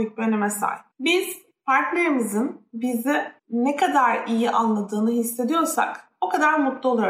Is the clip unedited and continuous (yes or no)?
no